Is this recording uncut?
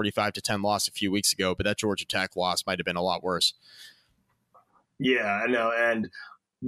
yes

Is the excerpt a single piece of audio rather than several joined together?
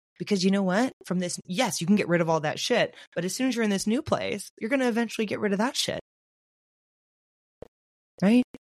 yes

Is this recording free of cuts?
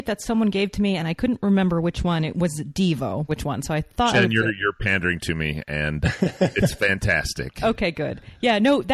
no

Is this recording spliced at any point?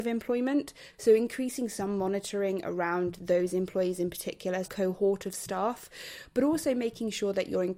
yes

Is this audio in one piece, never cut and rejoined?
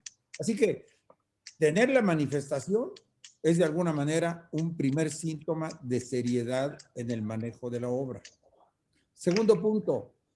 yes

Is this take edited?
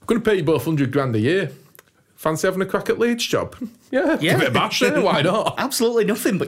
yes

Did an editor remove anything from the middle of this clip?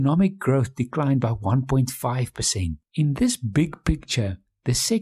yes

